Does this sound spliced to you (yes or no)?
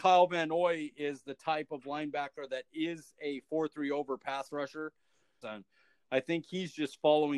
yes